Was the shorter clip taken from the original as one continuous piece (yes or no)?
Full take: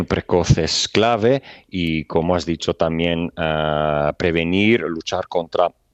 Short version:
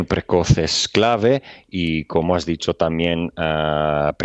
yes